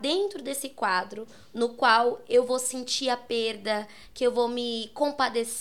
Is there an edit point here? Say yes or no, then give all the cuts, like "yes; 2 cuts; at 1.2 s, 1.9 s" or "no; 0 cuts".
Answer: no; 0 cuts